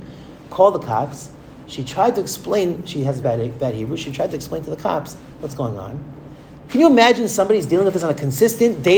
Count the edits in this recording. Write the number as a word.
two